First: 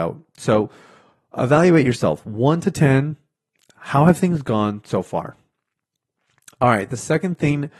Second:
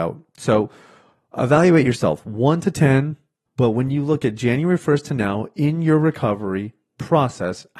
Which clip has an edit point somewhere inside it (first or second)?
second